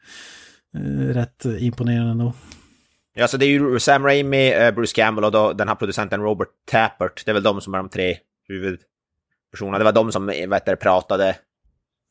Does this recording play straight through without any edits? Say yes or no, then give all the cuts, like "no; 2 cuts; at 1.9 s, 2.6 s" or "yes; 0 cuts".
yes; 0 cuts